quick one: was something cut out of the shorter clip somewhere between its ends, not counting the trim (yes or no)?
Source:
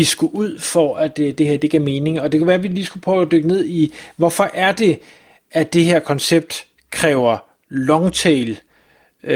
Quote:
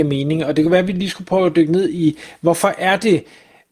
no